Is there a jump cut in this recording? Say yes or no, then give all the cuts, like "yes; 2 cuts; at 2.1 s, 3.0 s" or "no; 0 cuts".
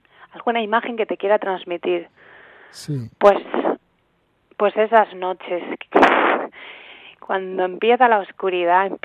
no; 0 cuts